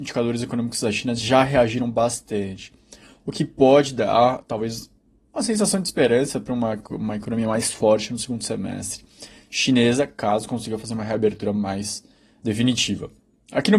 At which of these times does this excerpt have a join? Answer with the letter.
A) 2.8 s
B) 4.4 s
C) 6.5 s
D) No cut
D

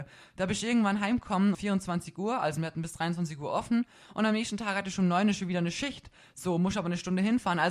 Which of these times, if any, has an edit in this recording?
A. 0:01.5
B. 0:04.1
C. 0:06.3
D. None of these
A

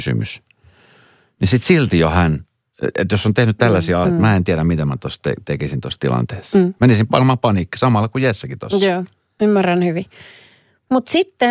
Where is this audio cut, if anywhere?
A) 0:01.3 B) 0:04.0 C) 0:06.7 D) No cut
B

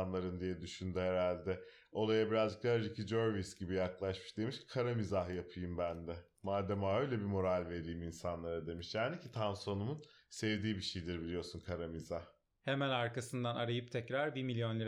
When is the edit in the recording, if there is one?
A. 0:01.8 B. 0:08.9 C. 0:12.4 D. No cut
D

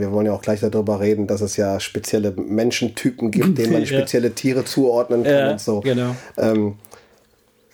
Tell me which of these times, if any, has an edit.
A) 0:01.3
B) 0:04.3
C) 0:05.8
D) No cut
D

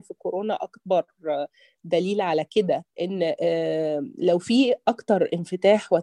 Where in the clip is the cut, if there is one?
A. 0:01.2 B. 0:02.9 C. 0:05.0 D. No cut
B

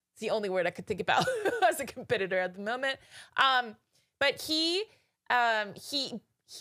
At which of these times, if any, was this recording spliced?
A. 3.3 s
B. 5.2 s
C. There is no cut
C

